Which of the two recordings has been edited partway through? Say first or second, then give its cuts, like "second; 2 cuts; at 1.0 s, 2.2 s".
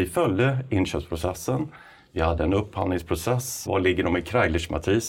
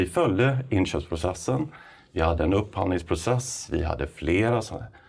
first; 1 cut; at 3.7 s